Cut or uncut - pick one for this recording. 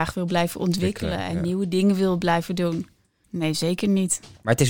cut